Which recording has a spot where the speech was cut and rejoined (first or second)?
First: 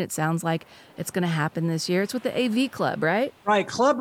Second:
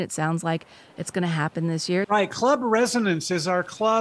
second